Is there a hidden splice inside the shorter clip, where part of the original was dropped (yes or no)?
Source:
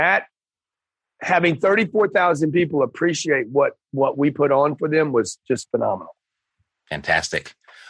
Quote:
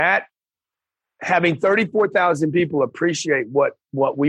no